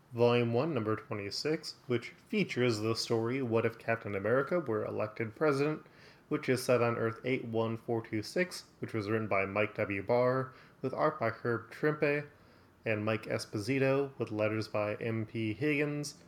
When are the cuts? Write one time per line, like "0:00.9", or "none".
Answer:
none